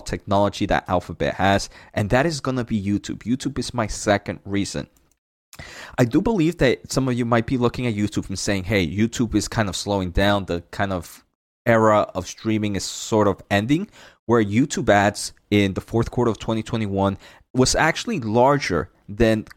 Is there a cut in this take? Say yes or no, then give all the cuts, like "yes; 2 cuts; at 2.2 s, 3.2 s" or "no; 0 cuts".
no; 0 cuts